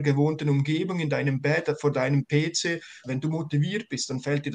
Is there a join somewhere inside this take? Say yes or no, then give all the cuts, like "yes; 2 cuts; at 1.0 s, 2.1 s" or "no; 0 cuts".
yes; 1 cut; at 3.0 s